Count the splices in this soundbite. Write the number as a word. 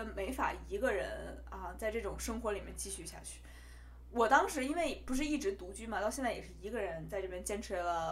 zero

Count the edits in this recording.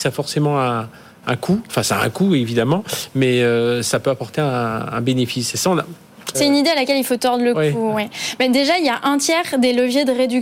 one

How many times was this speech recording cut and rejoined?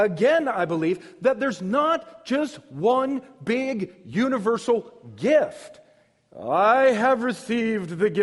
zero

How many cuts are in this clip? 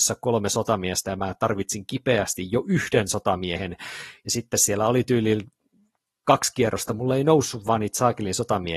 zero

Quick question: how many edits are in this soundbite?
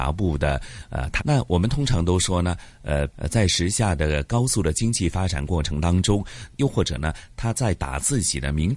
three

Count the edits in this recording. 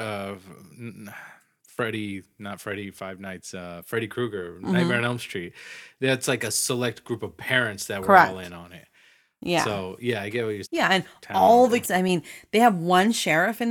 two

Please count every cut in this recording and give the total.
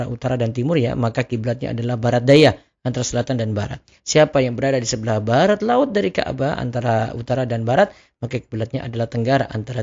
zero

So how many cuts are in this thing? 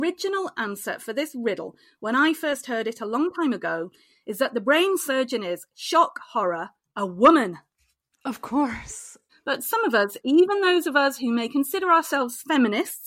one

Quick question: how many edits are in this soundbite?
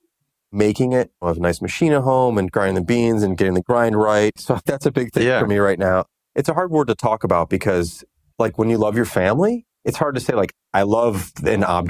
one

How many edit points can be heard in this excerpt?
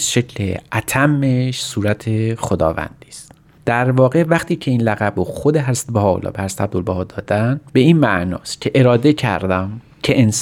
one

